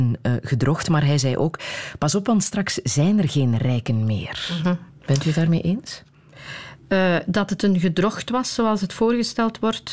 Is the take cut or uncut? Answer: uncut